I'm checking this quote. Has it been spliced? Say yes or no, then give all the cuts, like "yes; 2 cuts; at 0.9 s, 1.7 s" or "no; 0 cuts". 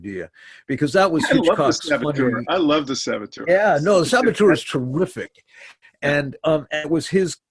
no; 0 cuts